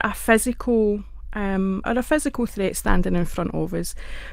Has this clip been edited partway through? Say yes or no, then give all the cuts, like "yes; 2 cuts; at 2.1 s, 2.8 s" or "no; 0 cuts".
yes; 1 cut; at 1.8 s